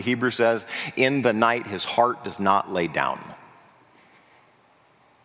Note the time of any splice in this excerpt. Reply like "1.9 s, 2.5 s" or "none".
none

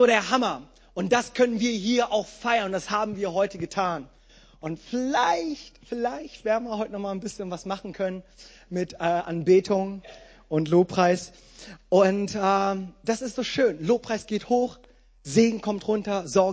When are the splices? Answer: none

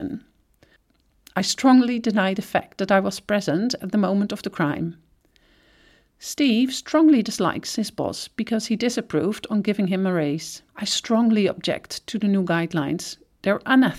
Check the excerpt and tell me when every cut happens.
10.7 s

